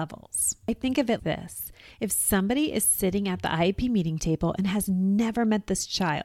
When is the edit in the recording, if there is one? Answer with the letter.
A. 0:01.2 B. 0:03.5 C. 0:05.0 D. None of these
A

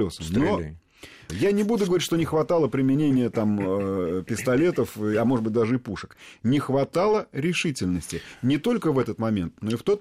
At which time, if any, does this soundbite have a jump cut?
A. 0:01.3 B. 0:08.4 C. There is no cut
A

